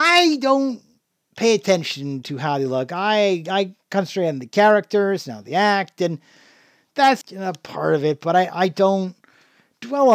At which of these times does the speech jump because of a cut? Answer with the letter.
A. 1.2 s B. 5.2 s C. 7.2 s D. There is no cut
C